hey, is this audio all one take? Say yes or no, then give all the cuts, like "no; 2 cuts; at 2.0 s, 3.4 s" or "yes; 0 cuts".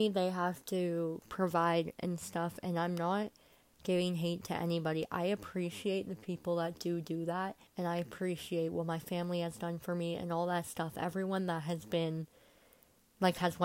no; 1 cut; at 7.7 s